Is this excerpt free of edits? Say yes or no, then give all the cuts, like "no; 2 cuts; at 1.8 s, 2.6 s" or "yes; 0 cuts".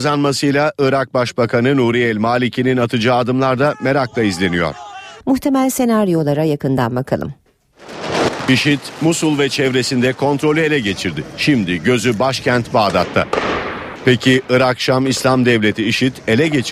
no; 1 cut; at 5.2 s